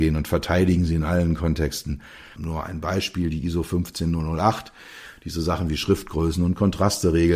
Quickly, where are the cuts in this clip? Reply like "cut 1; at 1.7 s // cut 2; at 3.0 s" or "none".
cut 1; at 2.4 s